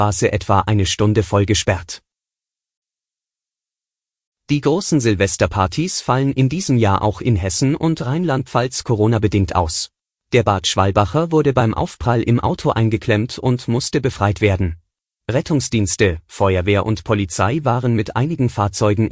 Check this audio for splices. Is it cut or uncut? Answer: cut